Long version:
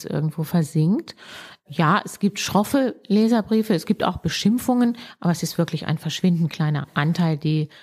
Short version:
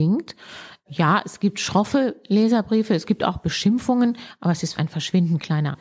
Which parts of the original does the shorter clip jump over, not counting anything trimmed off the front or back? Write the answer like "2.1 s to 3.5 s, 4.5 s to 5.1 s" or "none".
5.6 s to 5.9 s